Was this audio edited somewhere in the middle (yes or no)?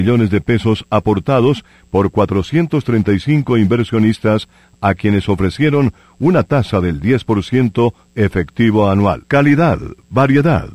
yes